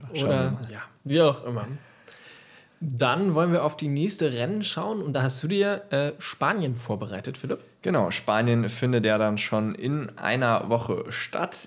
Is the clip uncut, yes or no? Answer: yes